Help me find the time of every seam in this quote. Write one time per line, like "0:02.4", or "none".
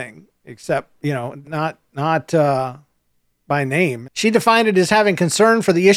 0:01.4
0:04.0